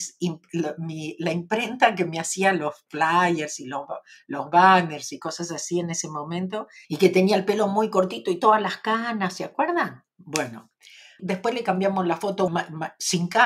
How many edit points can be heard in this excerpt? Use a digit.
3